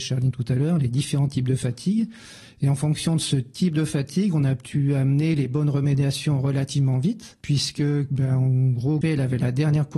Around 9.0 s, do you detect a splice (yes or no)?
yes